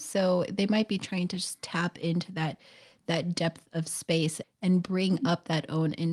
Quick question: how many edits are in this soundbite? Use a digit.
1